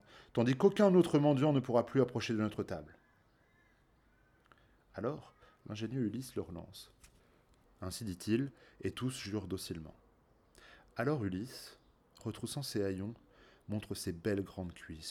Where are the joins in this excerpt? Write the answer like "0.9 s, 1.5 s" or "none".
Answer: 7.6 s